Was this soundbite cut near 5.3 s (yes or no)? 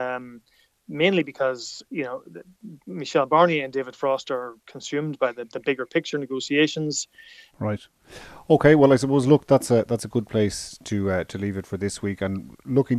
no